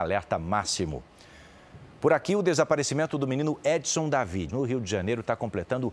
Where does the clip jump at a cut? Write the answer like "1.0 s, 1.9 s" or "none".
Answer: 4.5 s

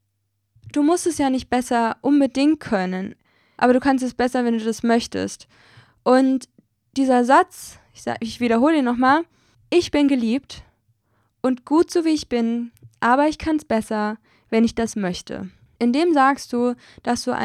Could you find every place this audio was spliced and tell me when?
none

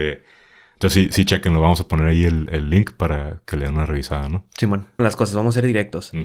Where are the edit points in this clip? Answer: 5.0 s

